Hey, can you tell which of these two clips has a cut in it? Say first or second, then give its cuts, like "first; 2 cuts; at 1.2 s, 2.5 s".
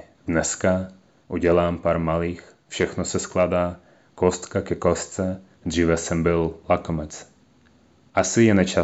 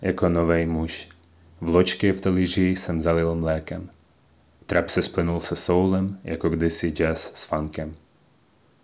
first; 1 cut; at 5.6 s